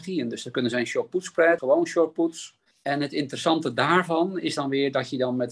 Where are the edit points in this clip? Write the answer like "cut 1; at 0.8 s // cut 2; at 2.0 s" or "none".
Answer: cut 1; at 1.6 s // cut 2; at 2.7 s